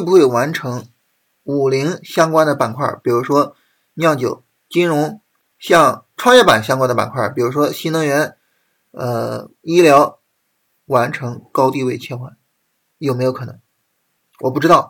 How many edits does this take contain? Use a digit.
0